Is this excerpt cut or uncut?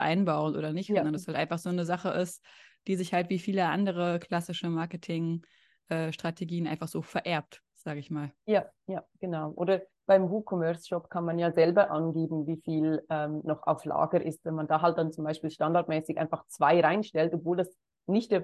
uncut